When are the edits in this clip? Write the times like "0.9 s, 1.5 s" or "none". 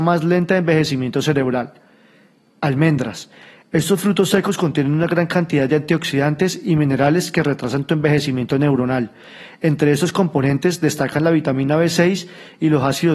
none